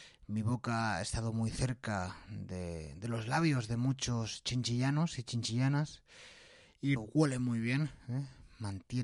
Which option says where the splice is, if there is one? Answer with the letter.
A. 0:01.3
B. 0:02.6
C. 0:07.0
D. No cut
C